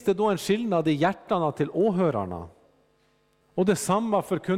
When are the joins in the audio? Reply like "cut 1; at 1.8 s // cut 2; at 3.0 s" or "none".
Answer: cut 1; at 3.4 s